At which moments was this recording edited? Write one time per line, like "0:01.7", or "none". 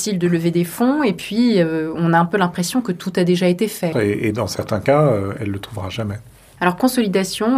0:03.9